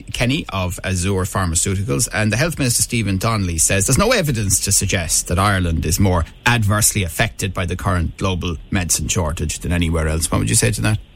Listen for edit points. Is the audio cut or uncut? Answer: uncut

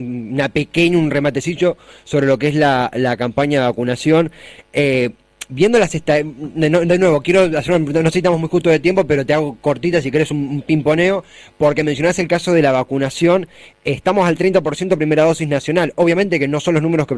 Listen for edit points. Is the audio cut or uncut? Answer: uncut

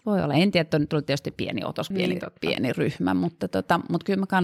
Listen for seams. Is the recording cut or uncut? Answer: cut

